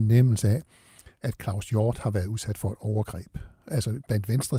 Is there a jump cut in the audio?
no; 0 cuts

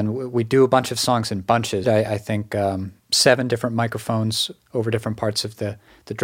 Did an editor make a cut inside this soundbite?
yes; 1 cut; at 1.8 s

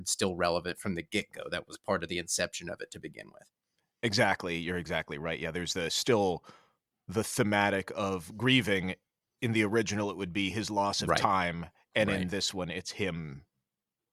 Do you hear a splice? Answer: no; 0 cuts

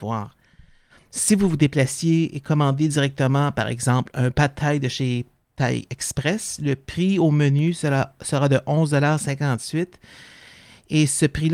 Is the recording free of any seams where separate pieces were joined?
yes; 0 cuts

